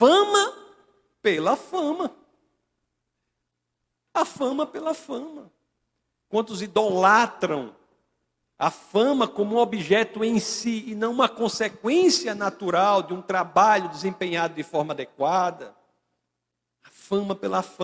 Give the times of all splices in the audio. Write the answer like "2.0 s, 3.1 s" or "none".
none